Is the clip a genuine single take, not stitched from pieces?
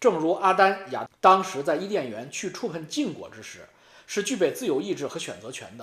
no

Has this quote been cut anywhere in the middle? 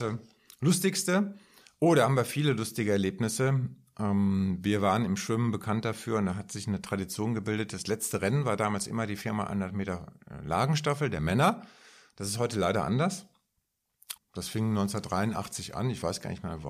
yes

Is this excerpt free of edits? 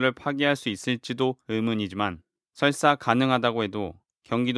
yes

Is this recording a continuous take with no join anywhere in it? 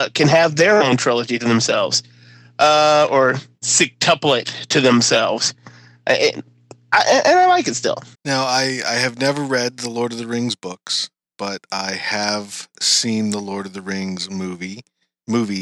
no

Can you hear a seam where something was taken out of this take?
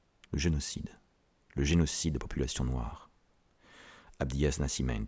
no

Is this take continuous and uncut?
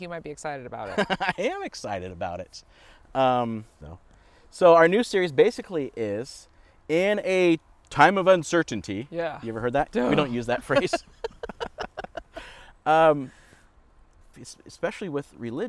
no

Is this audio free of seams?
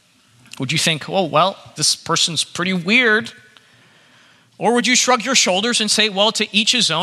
no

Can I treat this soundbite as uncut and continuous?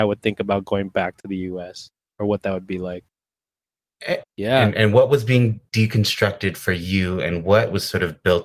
no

